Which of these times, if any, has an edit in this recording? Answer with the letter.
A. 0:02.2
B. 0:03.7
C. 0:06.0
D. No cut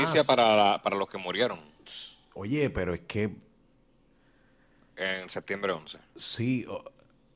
D